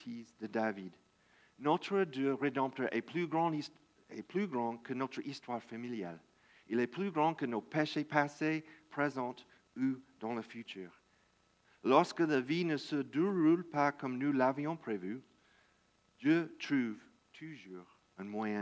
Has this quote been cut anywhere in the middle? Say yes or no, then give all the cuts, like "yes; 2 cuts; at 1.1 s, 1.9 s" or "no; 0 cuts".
yes; 1 cut; at 11.6 s